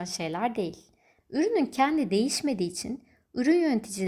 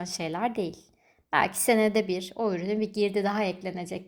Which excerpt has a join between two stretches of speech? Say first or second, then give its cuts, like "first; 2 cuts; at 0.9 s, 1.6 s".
first; 1 cut; at 1.2 s